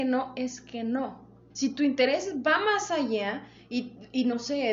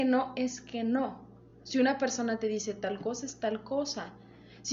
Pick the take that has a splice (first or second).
first